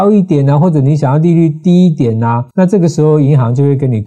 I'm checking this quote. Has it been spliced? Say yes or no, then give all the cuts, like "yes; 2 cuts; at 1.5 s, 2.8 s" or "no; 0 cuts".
yes; 1 cut; at 2.5 s